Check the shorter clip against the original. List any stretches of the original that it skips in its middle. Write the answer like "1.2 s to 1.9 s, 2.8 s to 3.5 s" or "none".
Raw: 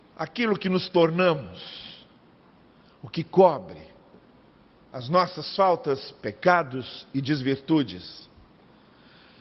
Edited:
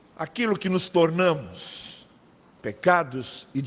2.6 s to 6.2 s